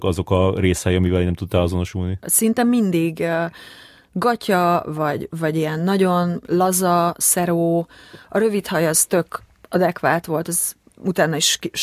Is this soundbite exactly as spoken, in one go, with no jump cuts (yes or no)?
no